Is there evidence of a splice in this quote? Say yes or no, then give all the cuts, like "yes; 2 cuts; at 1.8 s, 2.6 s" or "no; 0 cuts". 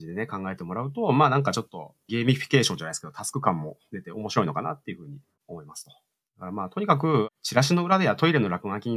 no; 0 cuts